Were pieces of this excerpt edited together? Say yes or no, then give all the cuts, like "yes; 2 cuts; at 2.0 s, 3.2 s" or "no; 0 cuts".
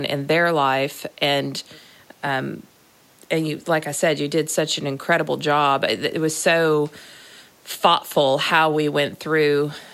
no; 0 cuts